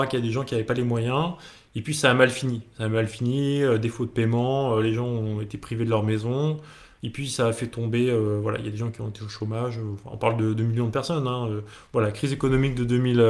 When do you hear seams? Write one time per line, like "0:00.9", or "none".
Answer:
none